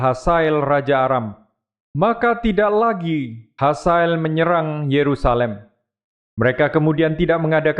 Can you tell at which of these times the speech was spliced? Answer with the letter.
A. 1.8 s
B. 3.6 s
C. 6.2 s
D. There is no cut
C